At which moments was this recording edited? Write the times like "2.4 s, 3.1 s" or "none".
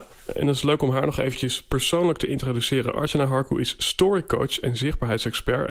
none